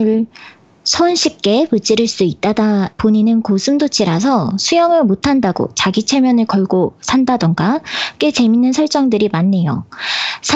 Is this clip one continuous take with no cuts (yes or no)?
no